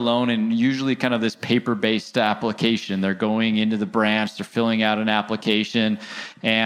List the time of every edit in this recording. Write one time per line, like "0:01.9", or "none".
none